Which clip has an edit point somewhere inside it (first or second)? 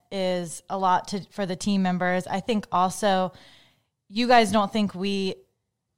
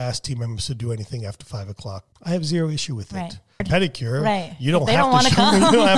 second